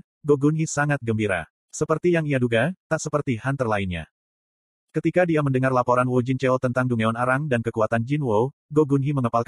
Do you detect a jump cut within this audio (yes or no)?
yes